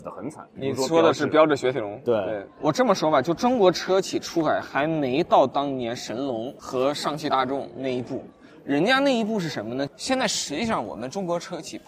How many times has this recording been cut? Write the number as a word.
one